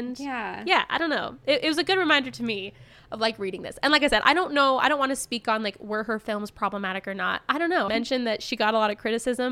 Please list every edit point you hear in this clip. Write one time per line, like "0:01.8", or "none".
0:07.9